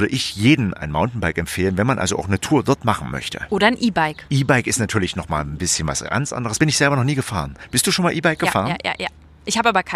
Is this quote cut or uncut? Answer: uncut